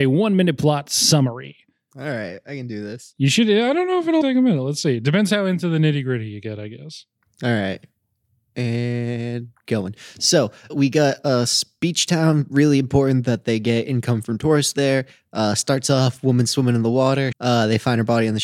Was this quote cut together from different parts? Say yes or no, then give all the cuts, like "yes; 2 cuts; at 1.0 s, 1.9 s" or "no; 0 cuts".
yes; 3 cuts; at 4.2 s, 10.7 s, 17.3 s